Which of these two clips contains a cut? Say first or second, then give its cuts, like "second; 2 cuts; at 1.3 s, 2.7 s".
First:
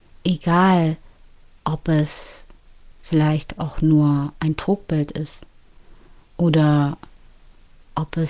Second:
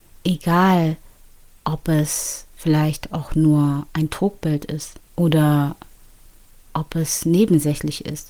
second; 2 cuts; at 2.5 s, 5.0 s